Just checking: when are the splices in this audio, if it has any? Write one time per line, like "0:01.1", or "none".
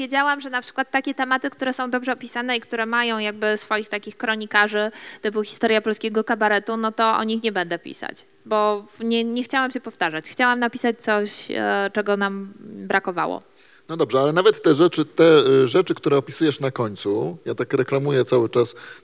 none